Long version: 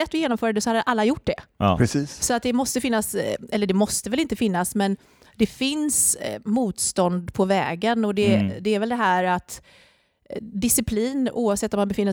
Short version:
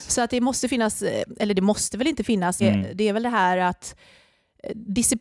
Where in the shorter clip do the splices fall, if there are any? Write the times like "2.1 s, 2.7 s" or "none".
2.6 s